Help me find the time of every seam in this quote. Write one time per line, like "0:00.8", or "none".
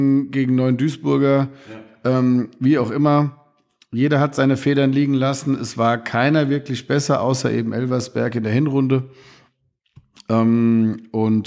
none

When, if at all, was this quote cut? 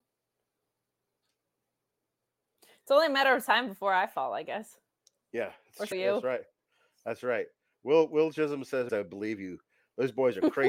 0:05.9
0:08.9

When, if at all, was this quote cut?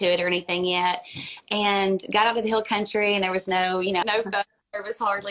0:01.4
0:04.0

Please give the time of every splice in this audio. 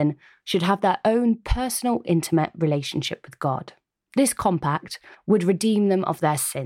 0:05.1

